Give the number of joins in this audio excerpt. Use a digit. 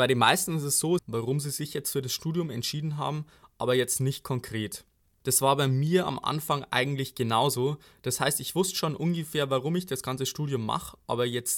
1